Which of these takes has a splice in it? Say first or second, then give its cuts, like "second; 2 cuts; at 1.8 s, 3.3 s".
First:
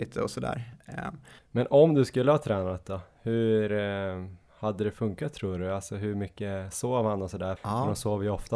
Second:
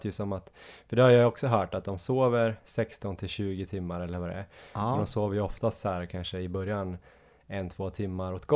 first; 2 cuts; at 1.4 s, 7.6 s